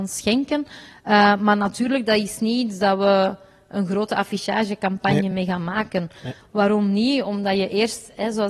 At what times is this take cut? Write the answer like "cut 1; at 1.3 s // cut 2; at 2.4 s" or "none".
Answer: none